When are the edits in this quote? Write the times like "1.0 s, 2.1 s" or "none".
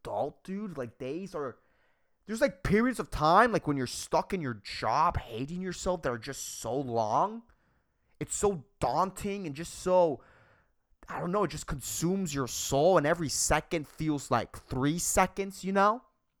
none